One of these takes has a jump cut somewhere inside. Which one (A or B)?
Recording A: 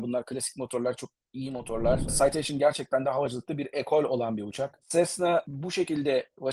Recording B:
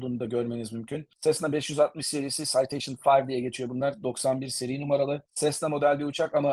A